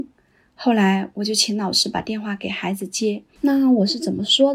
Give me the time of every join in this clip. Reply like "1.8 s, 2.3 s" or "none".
3.3 s